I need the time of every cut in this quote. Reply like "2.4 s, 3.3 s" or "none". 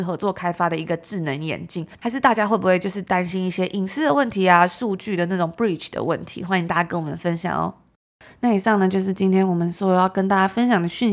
2.0 s